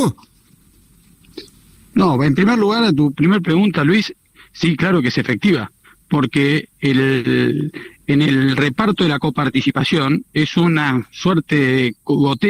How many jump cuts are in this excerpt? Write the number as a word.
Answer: zero